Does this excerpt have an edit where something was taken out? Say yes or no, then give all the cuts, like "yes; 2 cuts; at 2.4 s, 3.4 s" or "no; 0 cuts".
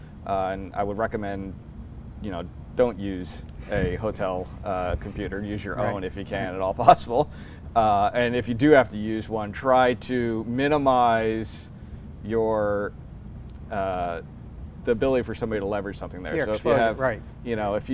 no; 0 cuts